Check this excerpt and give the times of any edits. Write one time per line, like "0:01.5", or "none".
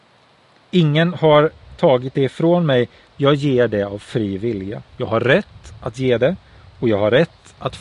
0:04.9